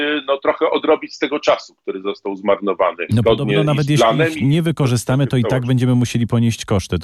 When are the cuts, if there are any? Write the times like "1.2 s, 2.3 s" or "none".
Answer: 3.1 s